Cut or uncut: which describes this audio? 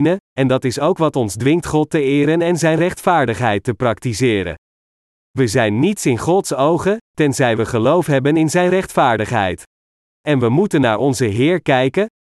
cut